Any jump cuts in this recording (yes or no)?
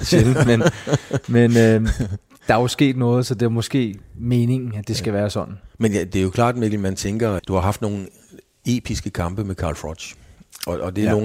yes